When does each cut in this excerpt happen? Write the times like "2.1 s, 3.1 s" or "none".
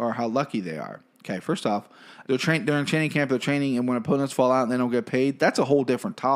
2.2 s